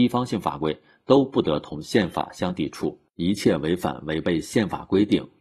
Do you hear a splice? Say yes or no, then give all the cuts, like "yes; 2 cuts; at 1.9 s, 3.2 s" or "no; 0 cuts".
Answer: no; 0 cuts